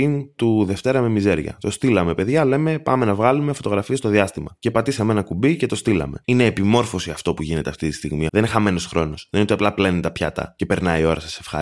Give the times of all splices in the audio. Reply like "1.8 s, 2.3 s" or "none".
6.2 s, 8.3 s